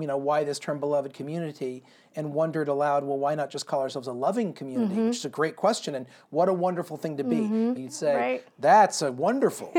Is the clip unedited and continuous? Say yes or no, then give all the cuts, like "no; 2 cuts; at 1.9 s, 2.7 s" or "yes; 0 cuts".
no; 1 cut; at 7.8 s